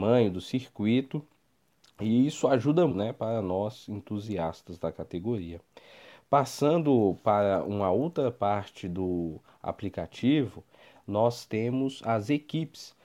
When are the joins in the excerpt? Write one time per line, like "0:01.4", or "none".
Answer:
0:02.9